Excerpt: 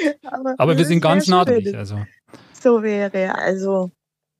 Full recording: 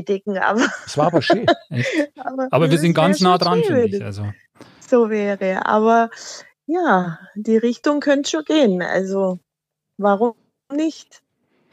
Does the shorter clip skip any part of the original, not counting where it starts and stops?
yes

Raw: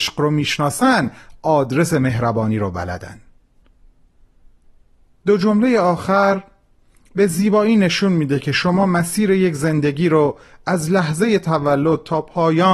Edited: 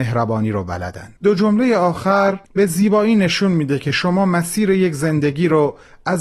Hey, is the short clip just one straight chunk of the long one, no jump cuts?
no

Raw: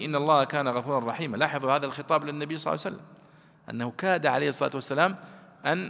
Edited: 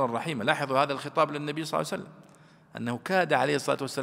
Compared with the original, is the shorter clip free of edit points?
yes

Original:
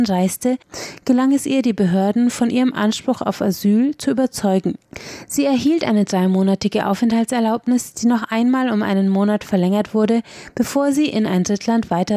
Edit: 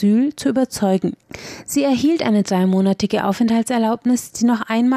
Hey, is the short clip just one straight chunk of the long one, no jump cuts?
yes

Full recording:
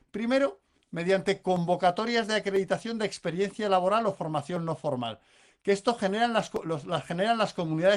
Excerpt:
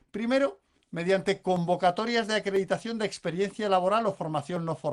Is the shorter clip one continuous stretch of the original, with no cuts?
yes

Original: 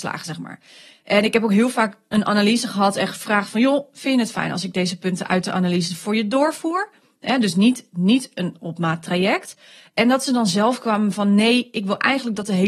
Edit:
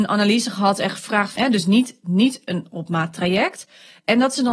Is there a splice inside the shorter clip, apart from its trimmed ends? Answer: yes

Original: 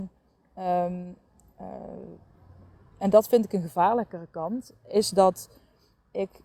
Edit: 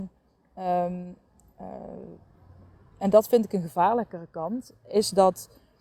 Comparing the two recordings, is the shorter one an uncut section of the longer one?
yes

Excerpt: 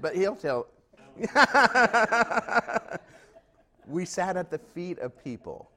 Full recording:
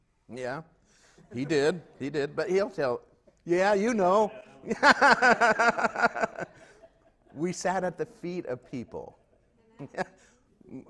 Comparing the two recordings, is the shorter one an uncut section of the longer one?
no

